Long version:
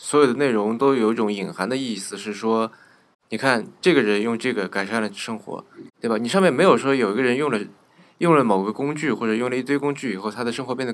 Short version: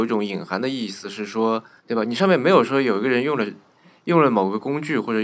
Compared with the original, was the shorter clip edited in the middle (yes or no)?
yes